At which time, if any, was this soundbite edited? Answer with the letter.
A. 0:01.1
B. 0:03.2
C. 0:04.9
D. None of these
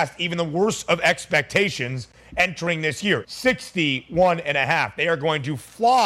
B